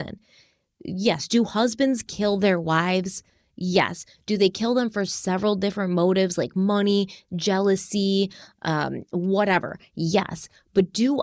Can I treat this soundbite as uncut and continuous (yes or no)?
yes